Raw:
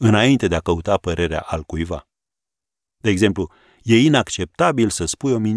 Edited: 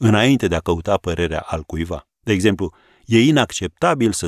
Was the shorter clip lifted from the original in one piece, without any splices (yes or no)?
no